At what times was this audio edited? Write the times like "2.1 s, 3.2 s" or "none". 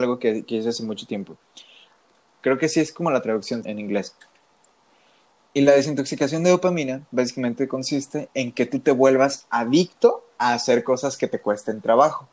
2.4 s, 3.6 s